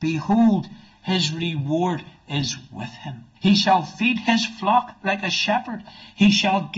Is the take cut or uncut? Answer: cut